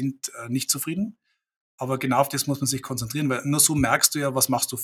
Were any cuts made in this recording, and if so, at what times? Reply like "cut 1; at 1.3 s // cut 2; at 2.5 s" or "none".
none